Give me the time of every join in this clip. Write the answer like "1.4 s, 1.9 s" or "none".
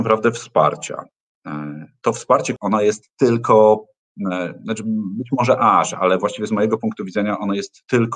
2.6 s